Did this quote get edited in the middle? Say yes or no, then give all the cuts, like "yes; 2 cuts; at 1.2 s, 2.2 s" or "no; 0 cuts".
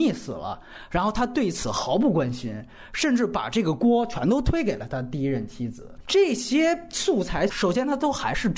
no; 0 cuts